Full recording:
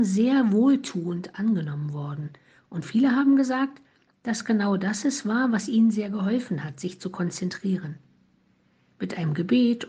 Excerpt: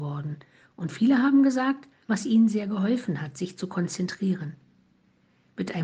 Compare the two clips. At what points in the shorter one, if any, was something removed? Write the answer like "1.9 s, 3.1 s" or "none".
2.1 s